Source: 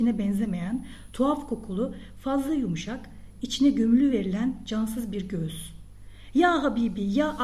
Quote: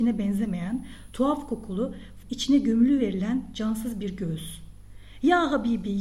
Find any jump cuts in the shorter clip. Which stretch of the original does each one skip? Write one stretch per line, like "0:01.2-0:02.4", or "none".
0:02.2-0:03.3